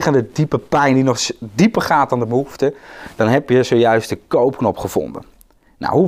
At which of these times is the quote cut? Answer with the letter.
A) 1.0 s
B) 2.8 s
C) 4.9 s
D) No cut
D